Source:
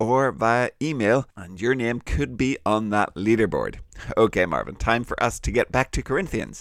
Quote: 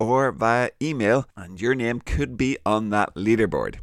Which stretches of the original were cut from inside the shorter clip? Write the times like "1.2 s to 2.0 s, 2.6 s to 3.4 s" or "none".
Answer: none